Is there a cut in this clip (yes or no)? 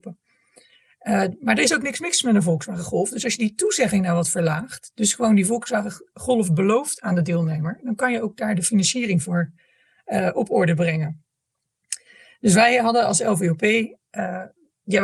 no